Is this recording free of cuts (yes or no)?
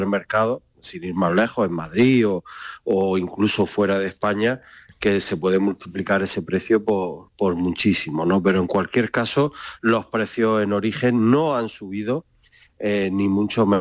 yes